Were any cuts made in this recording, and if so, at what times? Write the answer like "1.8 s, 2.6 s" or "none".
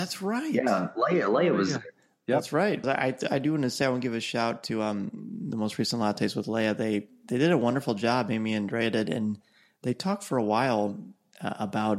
2.8 s